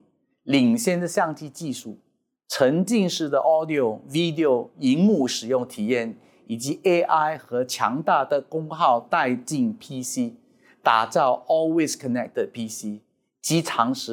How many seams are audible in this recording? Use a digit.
0